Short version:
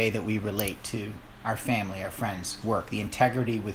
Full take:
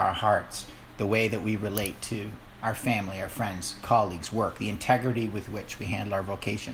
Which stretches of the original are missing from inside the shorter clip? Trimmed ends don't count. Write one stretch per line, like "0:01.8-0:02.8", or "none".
0:03.8-0:04.3